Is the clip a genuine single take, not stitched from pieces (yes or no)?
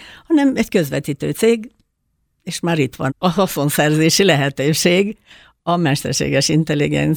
no